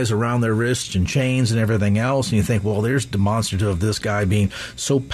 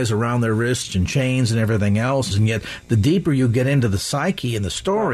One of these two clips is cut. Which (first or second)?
second